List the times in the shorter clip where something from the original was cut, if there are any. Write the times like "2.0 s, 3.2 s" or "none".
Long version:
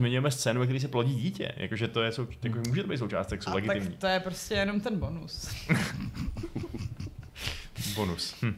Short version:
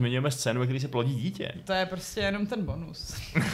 1.5 s